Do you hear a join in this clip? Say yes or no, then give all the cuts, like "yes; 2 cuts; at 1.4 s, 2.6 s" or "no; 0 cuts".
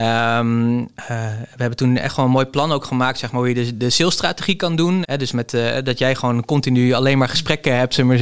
yes; 1 cut; at 5.0 s